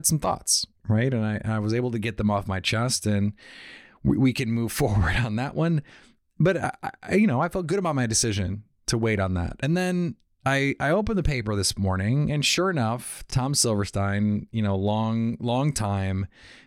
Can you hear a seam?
no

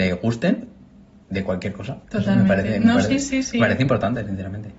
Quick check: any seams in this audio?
yes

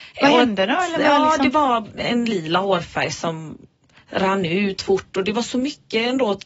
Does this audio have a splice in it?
yes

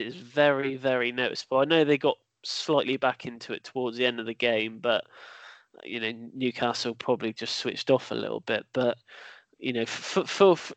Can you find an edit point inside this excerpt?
no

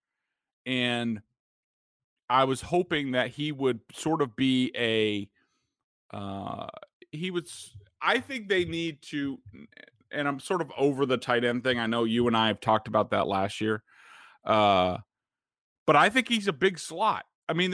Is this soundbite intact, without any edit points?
yes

